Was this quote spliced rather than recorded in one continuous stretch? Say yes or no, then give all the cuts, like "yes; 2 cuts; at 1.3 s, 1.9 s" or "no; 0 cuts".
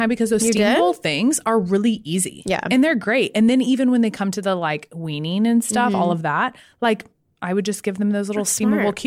no; 0 cuts